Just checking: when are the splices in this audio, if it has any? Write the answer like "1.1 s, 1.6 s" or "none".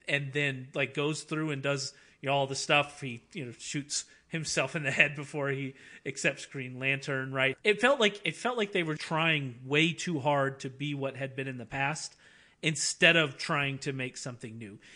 7.5 s, 9.0 s